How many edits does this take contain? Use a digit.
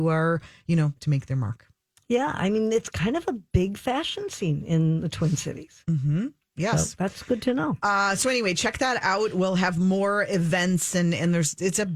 1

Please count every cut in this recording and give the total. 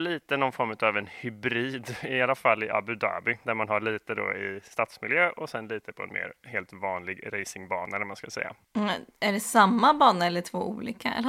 0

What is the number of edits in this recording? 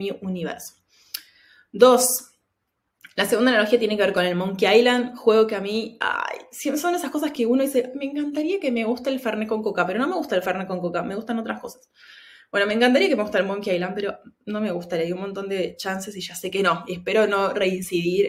0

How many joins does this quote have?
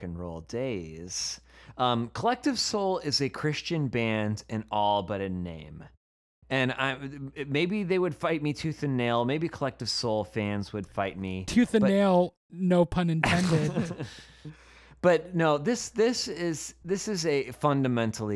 0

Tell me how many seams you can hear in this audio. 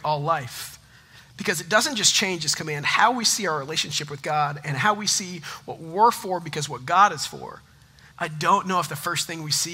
1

